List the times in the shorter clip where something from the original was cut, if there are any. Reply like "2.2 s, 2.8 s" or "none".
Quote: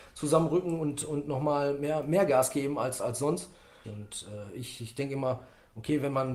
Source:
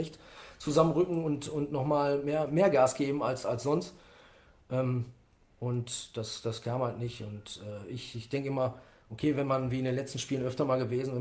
3.8 s